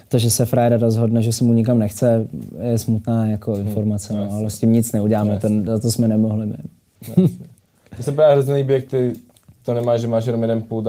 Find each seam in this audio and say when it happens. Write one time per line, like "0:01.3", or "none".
none